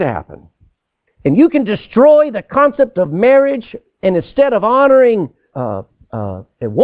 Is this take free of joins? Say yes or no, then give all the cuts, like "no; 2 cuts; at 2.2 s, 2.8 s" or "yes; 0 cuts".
no; 2 cuts; at 1.1 s, 5.5 s